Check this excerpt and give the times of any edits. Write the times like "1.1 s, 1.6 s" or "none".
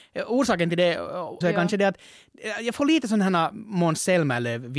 1.4 s